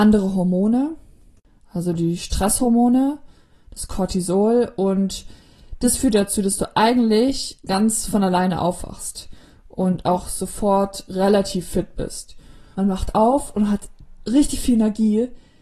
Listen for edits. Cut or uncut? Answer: cut